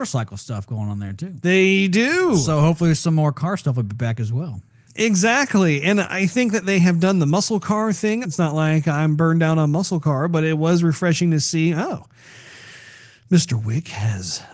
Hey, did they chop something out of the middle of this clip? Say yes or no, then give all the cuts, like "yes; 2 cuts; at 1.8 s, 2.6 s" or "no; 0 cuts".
yes; 2 cuts; at 4.9 s, 8.2 s